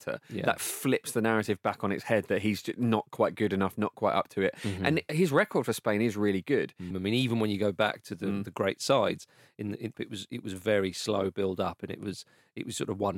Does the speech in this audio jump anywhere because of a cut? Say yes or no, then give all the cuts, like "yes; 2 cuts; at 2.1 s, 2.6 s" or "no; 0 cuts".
yes; 2 cuts; at 6.9 s, 9.9 s